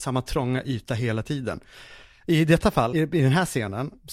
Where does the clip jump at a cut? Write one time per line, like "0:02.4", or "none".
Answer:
0:02.9